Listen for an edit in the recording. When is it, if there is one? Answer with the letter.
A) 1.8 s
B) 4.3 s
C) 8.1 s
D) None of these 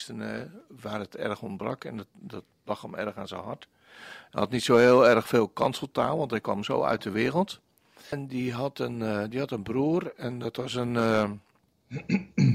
C